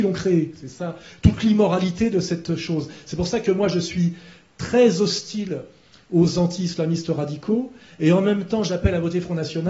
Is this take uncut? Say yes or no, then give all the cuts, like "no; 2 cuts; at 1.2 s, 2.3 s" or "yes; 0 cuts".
yes; 0 cuts